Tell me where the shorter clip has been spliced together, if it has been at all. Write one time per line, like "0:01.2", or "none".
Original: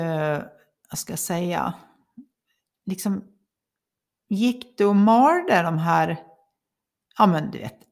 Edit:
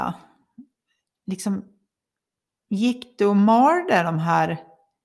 none